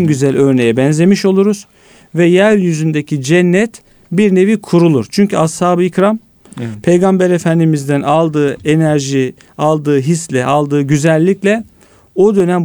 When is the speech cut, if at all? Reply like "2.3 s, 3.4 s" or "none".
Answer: none